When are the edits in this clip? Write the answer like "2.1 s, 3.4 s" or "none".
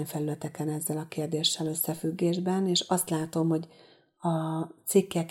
none